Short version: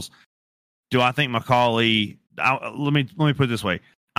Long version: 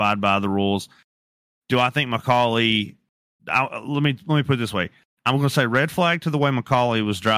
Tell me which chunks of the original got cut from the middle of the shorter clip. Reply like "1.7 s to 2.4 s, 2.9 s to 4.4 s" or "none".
3.0 s to 3.4 s